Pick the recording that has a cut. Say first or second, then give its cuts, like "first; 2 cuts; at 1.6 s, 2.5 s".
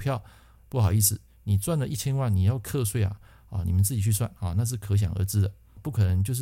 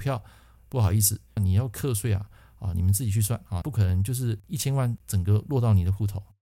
second; 2 cuts; at 1.4 s, 3.6 s